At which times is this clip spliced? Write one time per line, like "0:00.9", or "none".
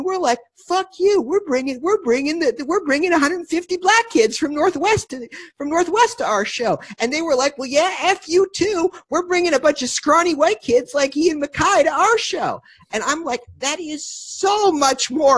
none